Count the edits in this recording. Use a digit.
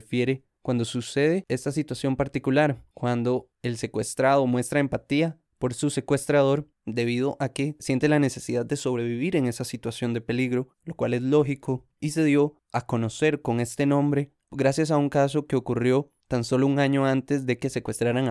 1